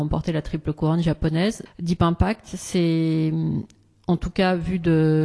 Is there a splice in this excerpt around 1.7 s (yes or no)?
yes